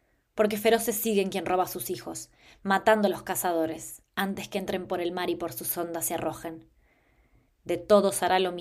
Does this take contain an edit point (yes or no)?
yes